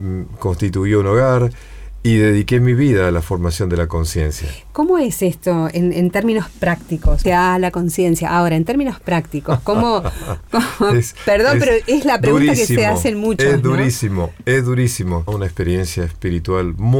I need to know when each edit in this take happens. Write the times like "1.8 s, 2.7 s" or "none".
7.2 s, 15.3 s